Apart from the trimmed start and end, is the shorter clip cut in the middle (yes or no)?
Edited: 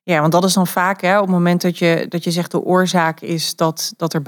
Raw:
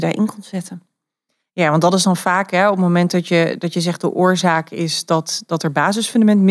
no